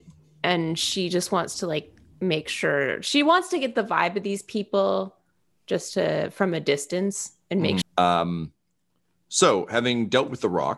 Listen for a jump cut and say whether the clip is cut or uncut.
cut